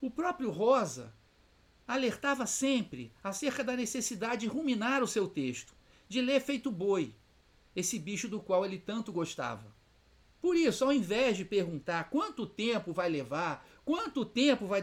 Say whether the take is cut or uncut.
cut